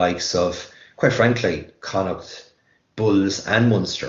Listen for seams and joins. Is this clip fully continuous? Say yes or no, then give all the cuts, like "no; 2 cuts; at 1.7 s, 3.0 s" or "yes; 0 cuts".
yes; 0 cuts